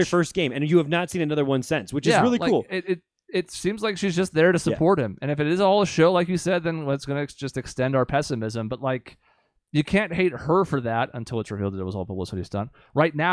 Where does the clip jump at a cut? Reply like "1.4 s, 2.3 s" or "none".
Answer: none